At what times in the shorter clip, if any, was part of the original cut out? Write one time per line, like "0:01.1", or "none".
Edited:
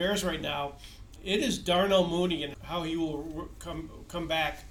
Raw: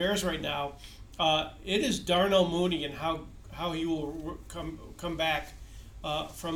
0:01.2
0:02.5